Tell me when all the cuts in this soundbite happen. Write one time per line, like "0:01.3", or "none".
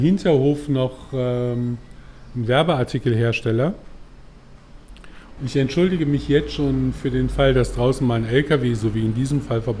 0:05.4